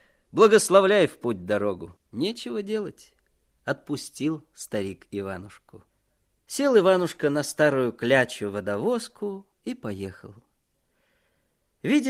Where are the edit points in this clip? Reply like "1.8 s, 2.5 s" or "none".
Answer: none